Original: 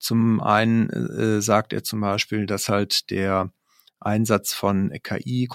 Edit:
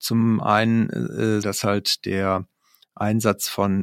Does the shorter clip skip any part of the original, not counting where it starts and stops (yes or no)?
yes